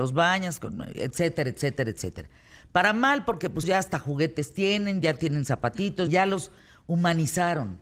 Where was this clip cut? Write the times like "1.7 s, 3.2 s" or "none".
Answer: 3.6 s, 6.1 s